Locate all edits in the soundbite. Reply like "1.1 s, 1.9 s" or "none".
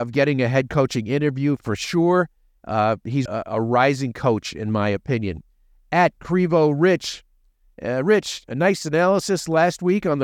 3.3 s

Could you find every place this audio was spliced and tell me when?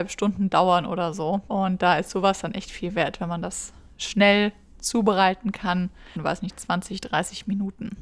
1.5 s, 6.2 s

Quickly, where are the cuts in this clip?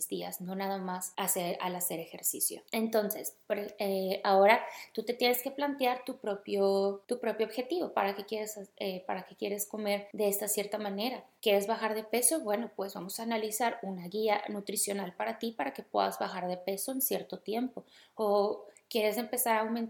none

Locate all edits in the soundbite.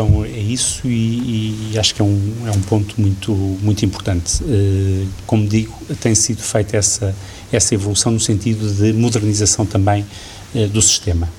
none

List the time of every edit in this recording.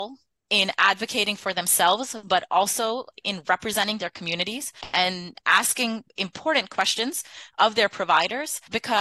none

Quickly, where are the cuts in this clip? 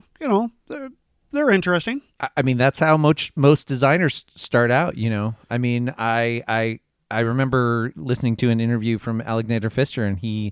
none

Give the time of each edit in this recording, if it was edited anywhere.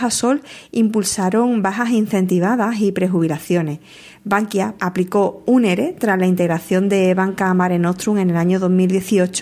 4.8 s

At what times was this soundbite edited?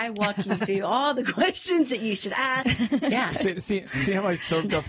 2.6 s

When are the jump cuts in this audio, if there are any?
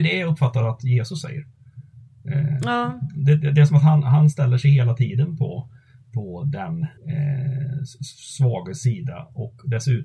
7.0 s

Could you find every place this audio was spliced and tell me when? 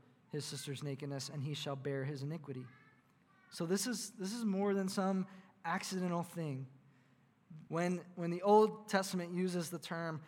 7.7 s

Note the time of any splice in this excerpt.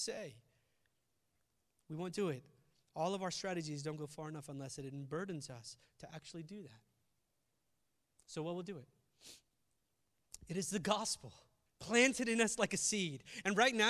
11.7 s

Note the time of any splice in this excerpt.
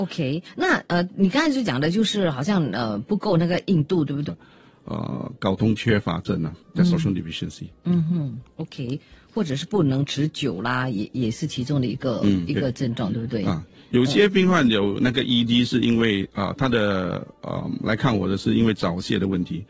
4.3 s

